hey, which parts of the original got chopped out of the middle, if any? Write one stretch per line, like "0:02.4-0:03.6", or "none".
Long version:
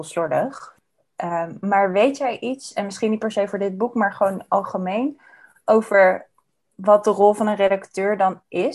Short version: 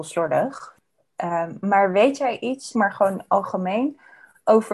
0:02.7-0:03.9